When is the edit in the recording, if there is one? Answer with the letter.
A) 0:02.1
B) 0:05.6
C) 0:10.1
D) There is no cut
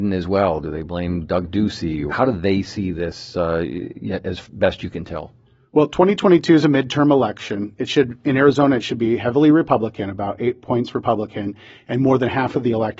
A